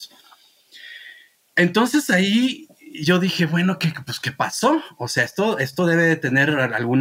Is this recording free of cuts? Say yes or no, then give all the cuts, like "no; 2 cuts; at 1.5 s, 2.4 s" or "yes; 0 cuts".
yes; 0 cuts